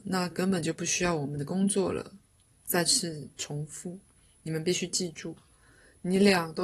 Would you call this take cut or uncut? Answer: cut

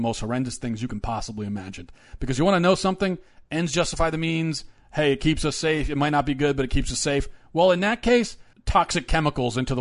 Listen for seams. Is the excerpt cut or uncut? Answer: cut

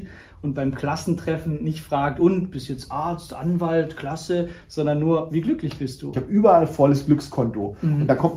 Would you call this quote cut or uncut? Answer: cut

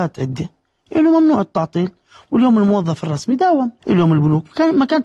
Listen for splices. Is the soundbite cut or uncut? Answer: cut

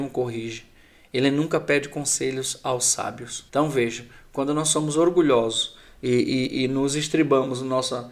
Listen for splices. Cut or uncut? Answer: cut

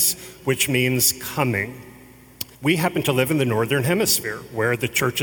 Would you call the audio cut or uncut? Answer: cut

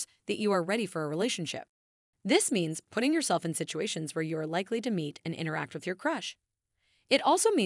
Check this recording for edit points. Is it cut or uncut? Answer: cut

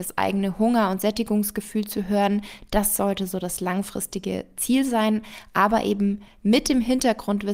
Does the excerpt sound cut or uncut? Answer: uncut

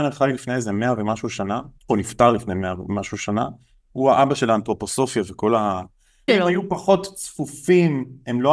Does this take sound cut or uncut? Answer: cut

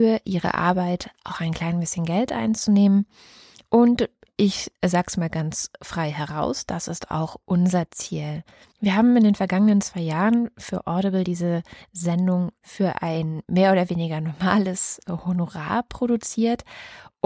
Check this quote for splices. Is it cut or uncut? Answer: uncut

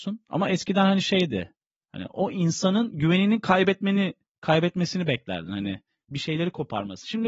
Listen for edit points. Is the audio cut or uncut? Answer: uncut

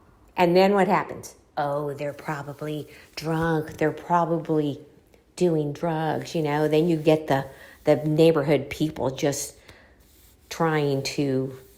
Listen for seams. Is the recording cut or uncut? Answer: uncut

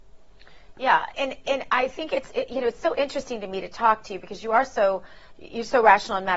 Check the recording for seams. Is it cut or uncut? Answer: cut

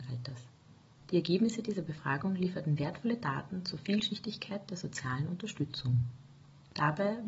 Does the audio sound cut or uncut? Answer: cut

